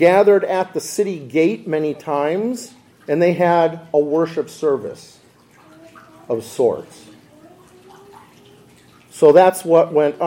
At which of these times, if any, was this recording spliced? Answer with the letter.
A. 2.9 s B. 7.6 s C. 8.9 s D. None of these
A